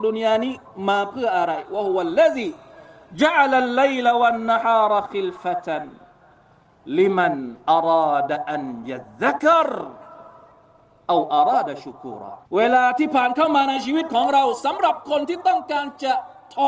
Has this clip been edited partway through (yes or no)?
yes